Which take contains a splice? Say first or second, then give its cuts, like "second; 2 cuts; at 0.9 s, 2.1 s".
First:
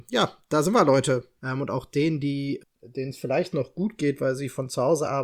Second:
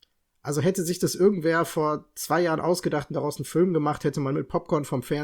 first; 2 cuts; at 1.4 s, 2.6 s